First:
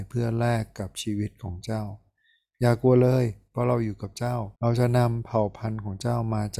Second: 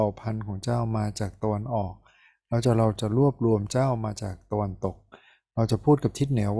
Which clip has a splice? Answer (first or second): first